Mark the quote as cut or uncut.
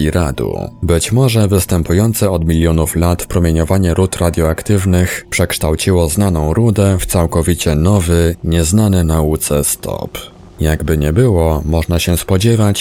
uncut